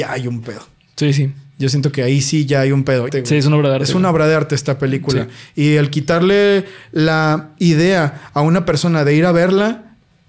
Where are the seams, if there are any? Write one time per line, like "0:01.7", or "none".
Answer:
0:03.1